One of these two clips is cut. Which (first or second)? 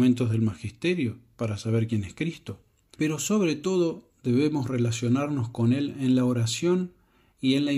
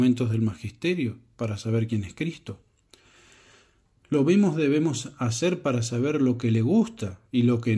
first